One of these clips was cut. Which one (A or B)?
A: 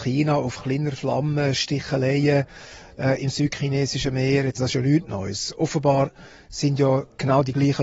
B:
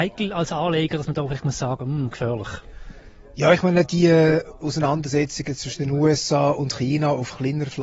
A